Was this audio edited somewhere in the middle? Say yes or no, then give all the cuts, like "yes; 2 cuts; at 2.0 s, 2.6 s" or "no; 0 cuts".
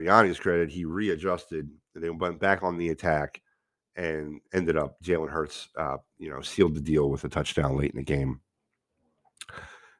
no; 0 cuts